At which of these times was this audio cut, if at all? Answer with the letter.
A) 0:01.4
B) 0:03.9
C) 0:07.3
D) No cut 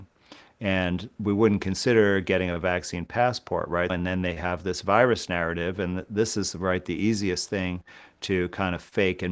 B